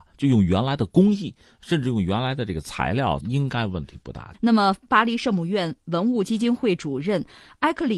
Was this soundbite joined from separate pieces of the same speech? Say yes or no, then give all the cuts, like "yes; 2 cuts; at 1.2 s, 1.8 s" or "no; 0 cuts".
yes; 2 cuts; at 3.2 s, 4.3 s